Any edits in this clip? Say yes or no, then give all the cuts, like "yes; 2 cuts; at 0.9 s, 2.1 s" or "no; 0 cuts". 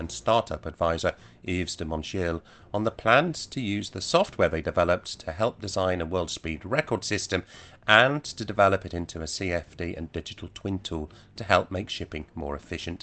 no; 0 cuts